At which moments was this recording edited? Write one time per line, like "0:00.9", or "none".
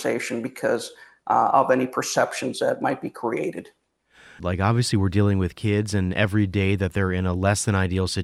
0:01.5
0:04.4